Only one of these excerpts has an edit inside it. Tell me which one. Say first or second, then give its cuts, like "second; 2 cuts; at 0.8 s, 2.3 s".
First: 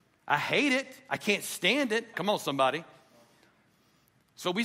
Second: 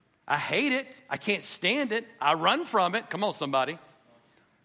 first; 1 cut; at 2.1 s